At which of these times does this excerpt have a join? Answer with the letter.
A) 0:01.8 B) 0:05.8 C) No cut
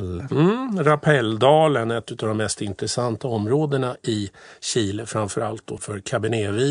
B